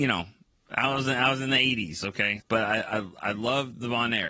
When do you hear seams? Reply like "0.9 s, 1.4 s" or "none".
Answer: 2.4 s